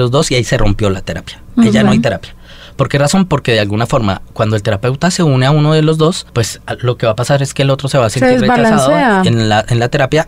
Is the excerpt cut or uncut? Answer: uncut